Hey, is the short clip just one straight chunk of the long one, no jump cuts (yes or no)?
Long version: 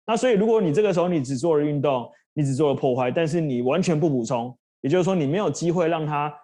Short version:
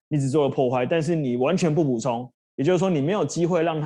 yes